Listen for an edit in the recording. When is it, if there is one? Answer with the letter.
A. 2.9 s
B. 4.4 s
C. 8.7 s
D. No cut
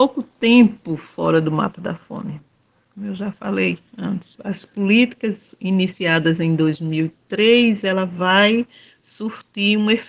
B